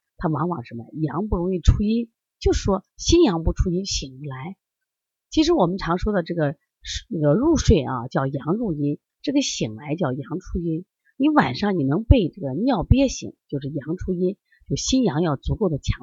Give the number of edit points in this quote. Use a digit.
0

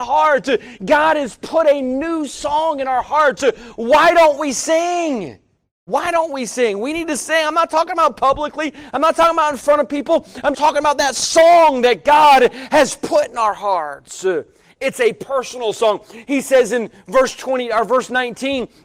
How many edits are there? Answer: 1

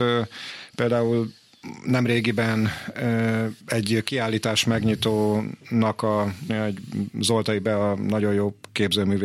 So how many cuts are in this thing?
2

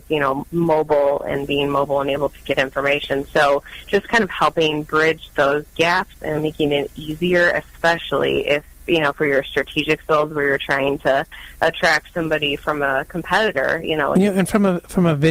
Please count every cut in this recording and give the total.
1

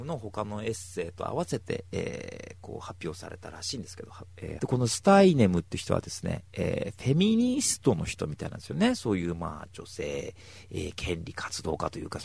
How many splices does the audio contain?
1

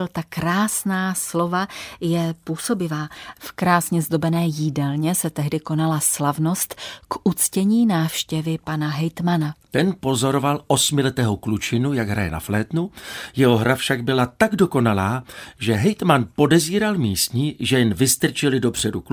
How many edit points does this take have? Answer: 1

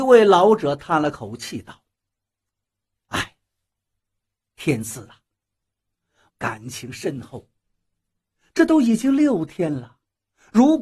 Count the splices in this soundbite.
2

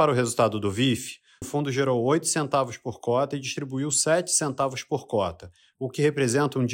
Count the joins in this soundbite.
1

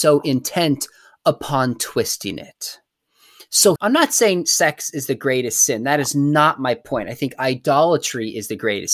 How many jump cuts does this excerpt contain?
1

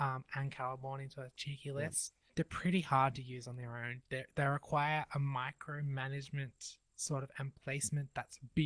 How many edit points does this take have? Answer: 0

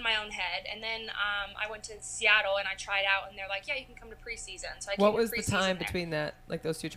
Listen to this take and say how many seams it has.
0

